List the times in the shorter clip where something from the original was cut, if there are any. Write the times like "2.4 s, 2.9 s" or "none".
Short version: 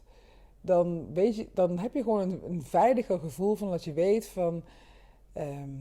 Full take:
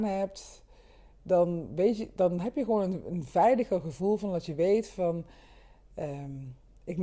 none